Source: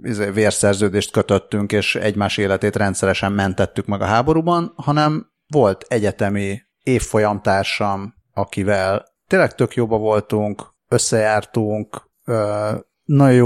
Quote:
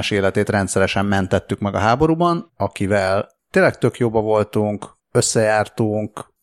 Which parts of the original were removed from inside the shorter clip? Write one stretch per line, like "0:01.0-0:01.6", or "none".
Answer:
0:04.7-0:08.2